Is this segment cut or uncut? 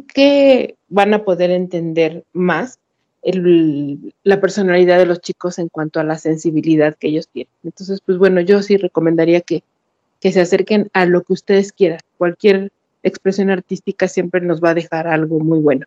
uncut